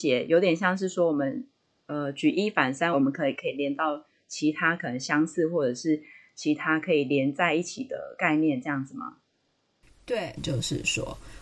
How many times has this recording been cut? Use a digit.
2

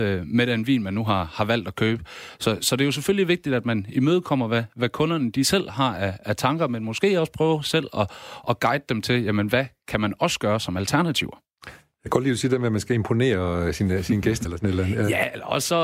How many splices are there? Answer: 1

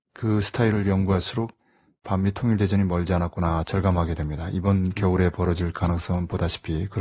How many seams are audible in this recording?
0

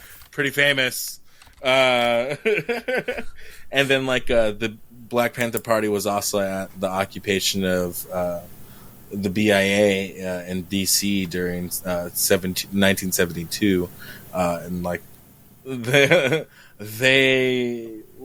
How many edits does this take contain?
0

